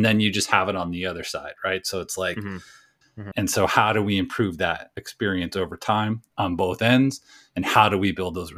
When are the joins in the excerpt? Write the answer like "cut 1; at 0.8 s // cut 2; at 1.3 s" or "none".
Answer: cut 1; at 3.0 s